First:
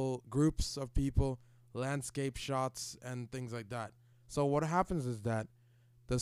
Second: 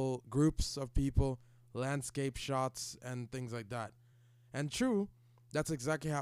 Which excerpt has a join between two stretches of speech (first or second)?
first